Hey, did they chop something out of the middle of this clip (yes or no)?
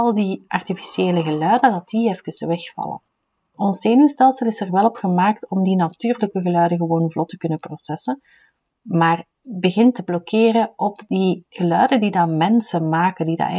yes